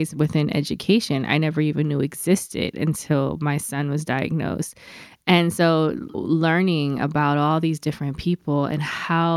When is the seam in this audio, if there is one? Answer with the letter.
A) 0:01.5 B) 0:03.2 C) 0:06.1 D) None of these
C